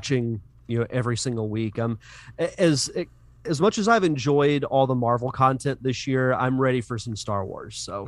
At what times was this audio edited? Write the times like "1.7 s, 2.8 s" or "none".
none

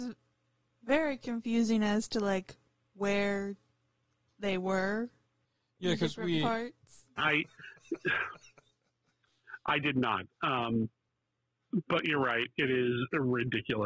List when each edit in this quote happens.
7.2 s

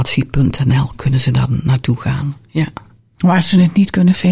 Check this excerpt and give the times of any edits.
none

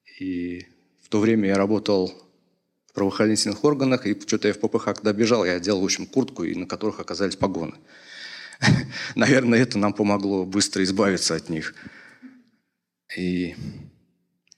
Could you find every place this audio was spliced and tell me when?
13.1 s

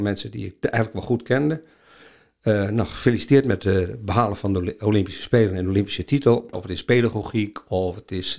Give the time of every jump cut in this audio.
6.5 s

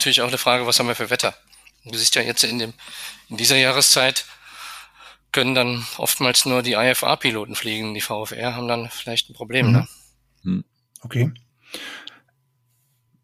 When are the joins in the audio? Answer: none

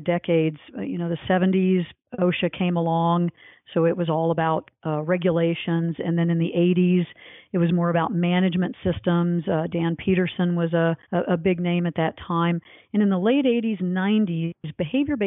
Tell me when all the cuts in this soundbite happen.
11.0 s

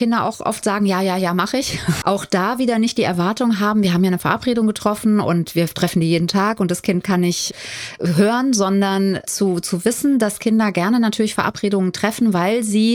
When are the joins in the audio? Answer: 2.0 s

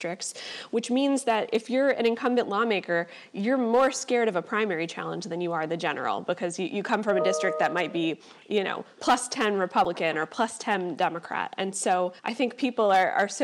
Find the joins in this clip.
12.2 s

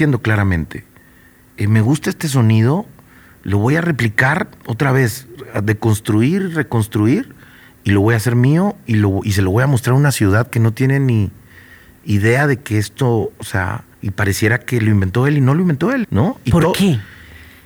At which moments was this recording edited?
13.9 s, 16.0 s

